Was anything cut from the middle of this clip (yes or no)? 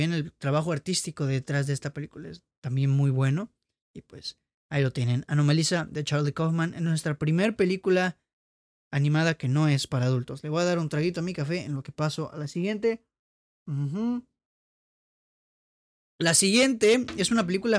no